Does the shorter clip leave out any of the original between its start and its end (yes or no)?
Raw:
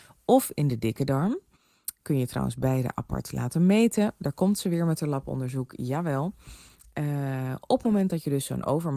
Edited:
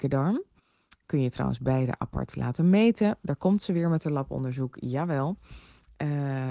no